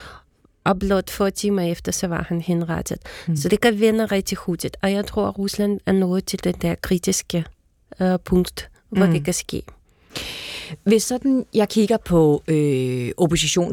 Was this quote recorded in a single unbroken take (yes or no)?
yes